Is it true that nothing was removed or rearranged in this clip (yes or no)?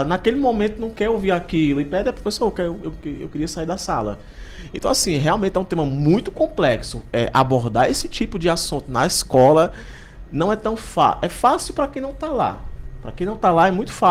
yes